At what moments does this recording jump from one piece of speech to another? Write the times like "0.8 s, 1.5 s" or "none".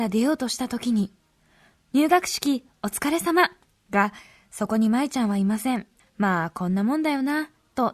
3.9 s, 6.0 s

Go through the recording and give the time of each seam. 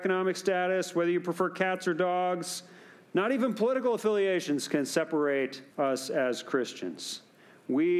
5.7 s

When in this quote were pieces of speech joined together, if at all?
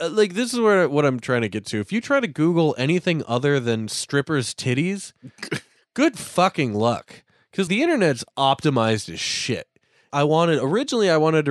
7.7 s, 10.1 s

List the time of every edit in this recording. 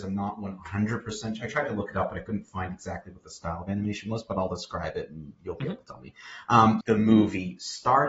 6.8 s

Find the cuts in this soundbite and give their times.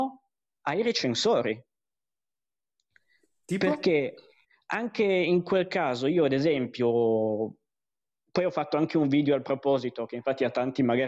none

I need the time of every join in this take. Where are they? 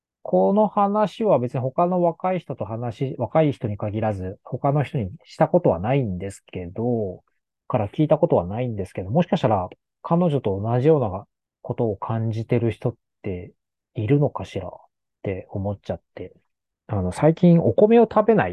none

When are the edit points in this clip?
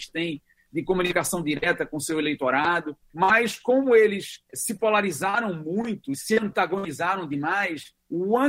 none

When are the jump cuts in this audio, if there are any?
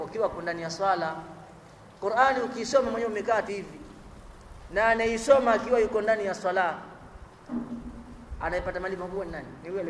3.5 s

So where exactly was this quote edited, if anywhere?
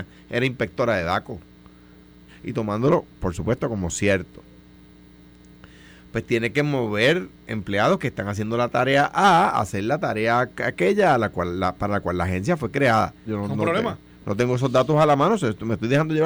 2.3 s, 13.3 s

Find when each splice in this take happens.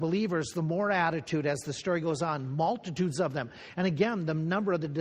none

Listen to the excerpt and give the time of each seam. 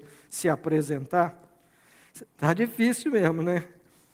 2.3 s

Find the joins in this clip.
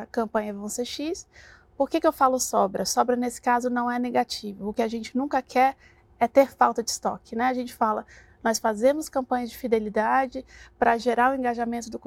none

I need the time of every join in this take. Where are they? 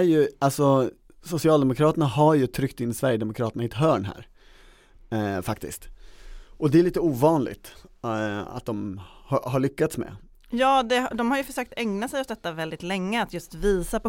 none

